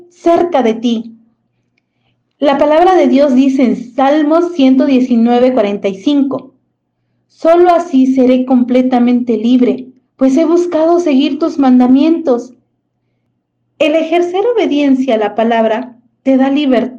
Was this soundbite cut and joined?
no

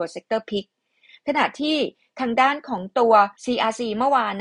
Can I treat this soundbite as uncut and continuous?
no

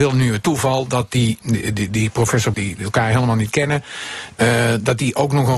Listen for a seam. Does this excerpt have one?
yes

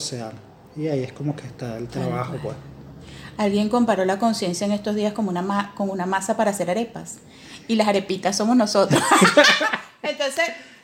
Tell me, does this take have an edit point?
no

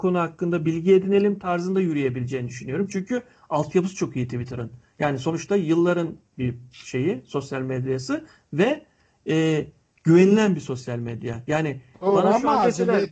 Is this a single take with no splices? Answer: yes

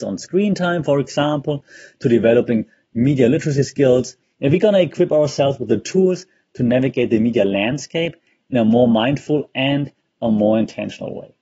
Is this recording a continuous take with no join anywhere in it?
yes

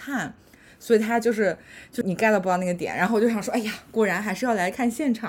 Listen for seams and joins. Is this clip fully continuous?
no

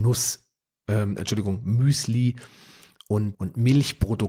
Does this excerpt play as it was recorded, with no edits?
no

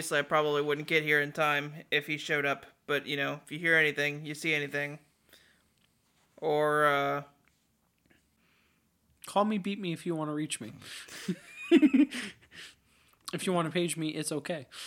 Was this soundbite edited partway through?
no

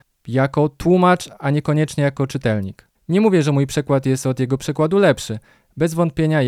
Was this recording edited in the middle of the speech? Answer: yes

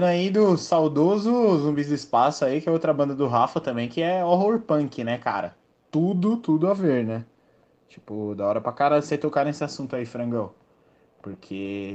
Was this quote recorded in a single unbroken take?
yes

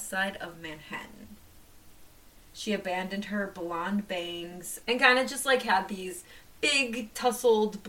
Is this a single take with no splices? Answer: no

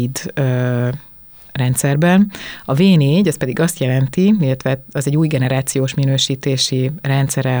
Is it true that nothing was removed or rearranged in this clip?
yes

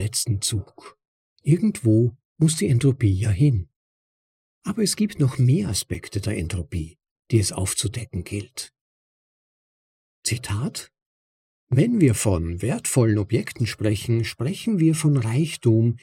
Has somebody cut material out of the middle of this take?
yes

